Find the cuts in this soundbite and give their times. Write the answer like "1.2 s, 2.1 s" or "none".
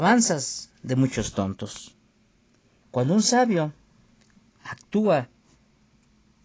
2.8 s